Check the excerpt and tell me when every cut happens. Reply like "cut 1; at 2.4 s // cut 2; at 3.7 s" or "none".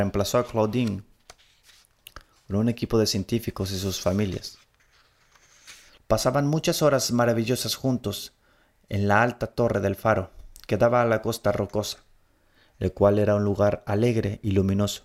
cut 1; at 6.0 s